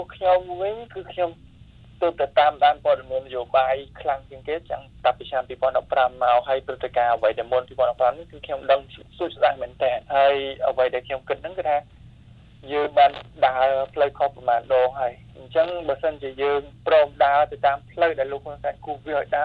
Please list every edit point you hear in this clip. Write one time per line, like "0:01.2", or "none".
0:10.0